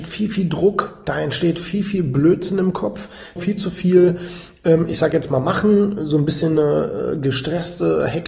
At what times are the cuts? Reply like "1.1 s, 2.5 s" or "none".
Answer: 3.4 s